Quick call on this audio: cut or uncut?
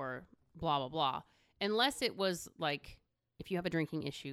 uncut